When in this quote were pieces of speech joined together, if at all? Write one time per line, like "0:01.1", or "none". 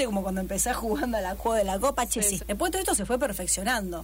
0:02.4